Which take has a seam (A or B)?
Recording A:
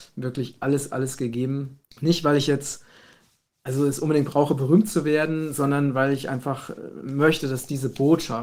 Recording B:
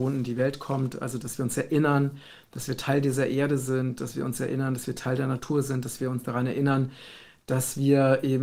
A